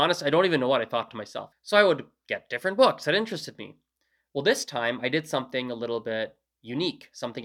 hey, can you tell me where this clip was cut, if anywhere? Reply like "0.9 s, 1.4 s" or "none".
1.5 s